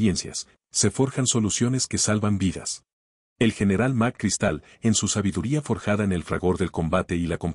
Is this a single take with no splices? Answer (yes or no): no